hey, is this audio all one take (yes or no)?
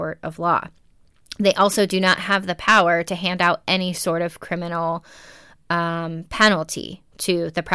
yes